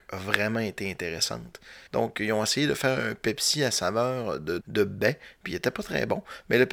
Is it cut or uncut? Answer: cut